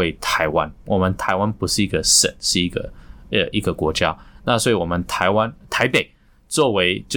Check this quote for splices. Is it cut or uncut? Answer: uncut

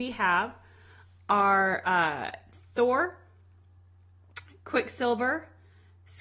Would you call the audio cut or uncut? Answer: uncut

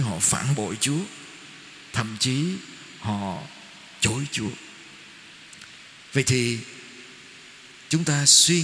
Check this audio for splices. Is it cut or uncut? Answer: uncut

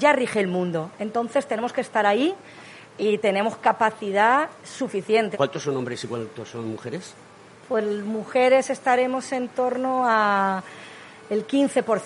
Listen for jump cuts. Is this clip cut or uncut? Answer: cut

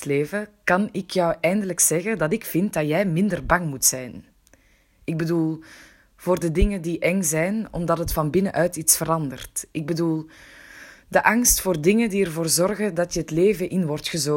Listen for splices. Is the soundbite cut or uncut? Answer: uncut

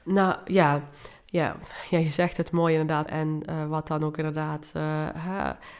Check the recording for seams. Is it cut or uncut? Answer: cut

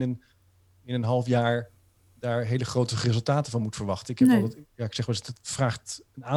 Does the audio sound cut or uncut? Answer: uncut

